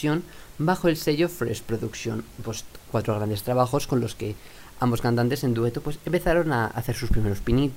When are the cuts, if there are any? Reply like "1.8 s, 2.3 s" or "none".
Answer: none